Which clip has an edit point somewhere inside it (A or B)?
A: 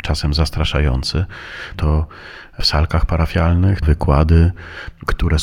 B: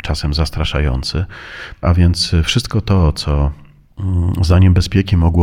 A